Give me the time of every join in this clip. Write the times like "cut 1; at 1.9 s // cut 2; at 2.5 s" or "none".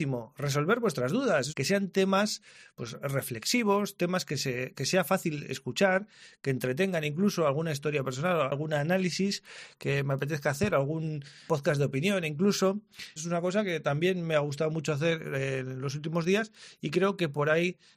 cut 1; at 1.5 s // cut 2; at 11.5 s // cut 3; at 13.2 s